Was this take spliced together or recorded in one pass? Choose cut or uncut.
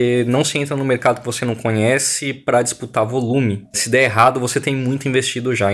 cut